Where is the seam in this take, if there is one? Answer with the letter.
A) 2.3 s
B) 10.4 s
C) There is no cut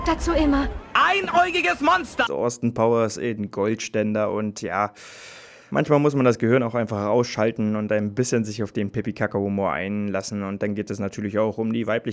A